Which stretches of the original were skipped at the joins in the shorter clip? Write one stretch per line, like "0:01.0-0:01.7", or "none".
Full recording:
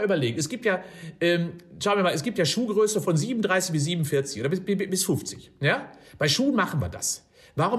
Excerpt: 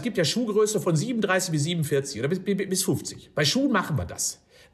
0:05.5-0:06.2